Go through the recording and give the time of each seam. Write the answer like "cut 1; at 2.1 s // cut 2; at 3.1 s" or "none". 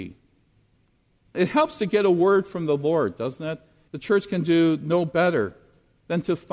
cut 1; at 1.2 s // cut 2; at 3.9 s